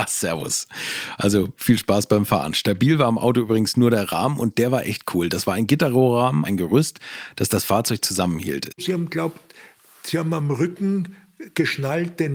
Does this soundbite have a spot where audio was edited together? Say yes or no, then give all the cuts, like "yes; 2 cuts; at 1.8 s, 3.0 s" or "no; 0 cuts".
yes; 2 cuts; at 6.4 s, 8.7 s